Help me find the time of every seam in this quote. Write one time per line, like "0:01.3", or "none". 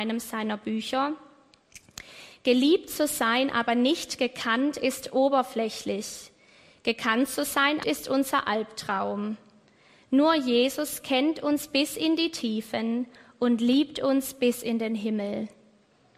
0:07.8

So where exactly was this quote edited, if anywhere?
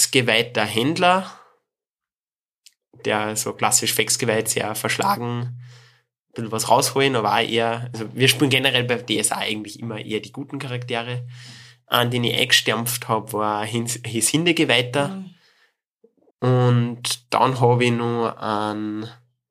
0:16.3

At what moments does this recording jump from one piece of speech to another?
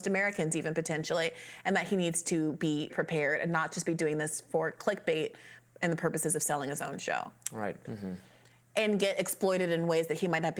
0:02.9
0:07.8

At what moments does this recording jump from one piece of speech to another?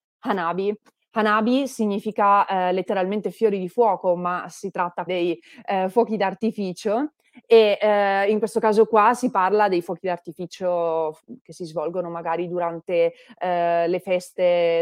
0:05.1

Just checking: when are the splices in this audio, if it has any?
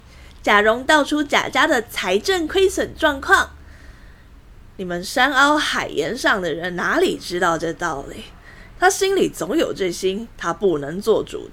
0:08.7

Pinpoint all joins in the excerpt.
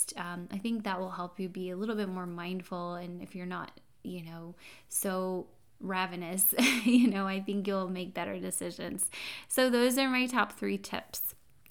none

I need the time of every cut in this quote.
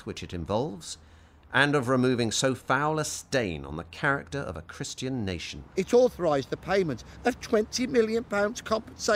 0:05.7

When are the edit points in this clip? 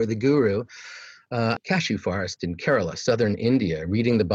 0:01.6

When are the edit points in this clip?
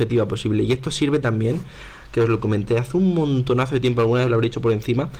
none

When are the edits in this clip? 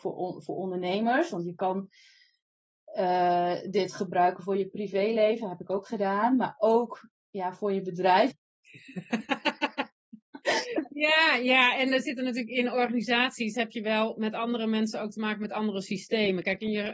0:08.3

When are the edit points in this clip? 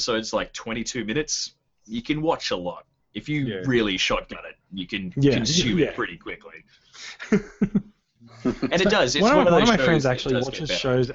none

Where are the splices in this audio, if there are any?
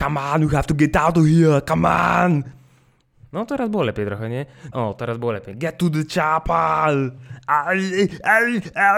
0:04.7

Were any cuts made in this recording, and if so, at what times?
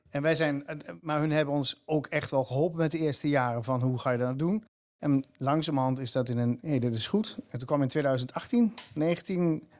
0:06.6

